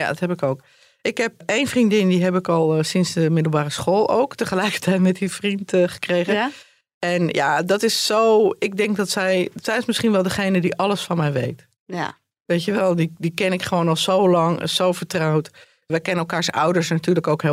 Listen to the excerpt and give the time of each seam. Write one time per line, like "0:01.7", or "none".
none

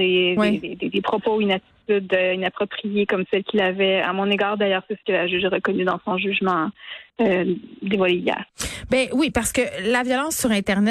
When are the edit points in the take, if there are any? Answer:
none

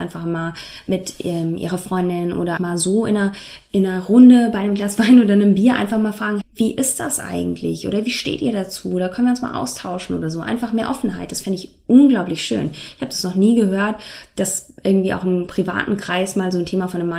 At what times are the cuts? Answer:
0:02.6
0:06.4

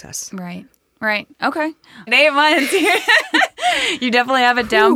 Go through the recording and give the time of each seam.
0:02.1

